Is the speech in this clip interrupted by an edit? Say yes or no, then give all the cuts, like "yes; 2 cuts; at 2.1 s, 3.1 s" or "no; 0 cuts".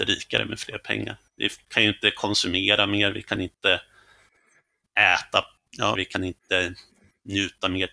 yes; 1 cut; at 6.0 s